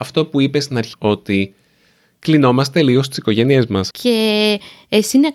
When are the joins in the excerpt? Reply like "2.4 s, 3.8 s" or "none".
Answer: 0.9 s, 3.9 s